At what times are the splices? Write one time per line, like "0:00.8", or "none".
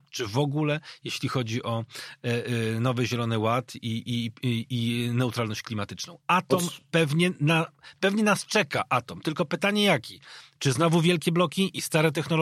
none